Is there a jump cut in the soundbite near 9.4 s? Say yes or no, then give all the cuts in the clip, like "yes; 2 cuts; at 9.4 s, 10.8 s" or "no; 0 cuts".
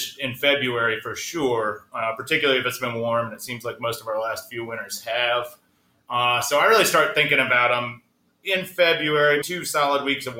yes; 1 cut; at 9.4 s